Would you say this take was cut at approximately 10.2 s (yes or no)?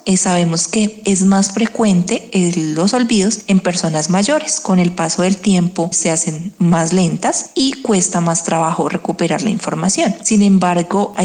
no